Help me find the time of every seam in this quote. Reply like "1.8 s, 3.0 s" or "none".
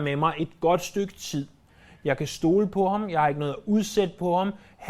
none

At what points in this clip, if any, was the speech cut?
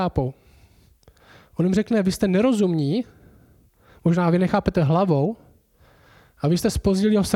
none

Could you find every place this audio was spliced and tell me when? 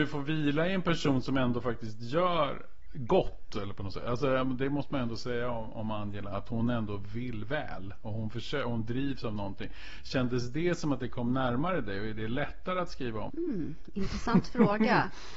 13.3 s

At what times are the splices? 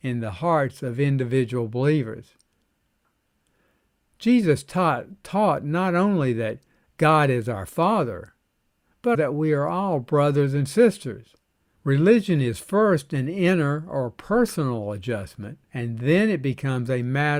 9.1 s, 11.8 s, 15.6 s

